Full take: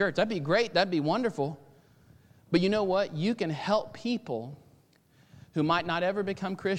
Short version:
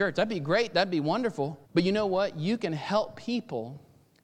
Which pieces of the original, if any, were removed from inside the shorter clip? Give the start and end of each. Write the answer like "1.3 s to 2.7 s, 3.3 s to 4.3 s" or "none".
1.7 s to 2.4 s